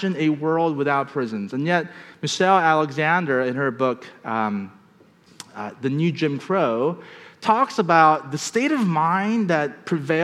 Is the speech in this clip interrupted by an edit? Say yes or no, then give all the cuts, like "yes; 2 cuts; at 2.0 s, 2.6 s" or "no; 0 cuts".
no; 0 cuts